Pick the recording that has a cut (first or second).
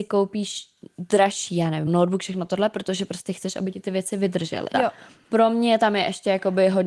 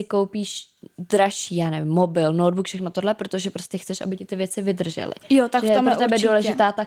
first